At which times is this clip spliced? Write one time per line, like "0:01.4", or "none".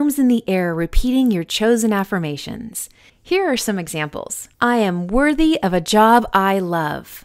0:03.1
0:04.5